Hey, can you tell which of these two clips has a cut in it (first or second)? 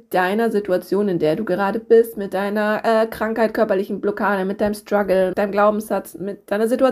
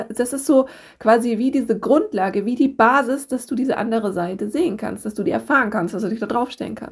first